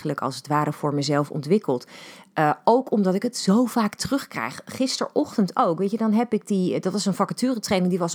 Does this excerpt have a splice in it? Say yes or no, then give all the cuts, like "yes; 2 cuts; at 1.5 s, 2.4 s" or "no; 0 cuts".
no; 0 cuts